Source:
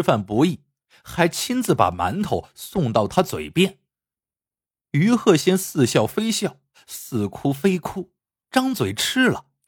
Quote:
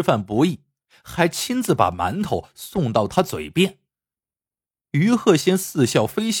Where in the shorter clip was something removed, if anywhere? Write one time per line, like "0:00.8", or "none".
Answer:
none